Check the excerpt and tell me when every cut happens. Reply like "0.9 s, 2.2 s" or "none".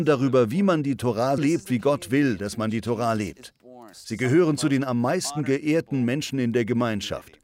1.4 s, 3.9 s